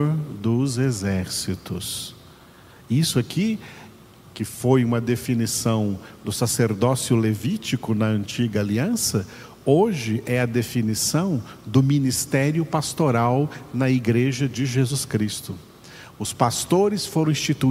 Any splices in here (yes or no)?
no